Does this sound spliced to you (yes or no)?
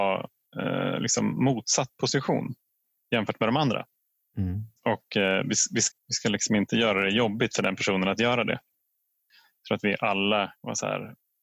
yes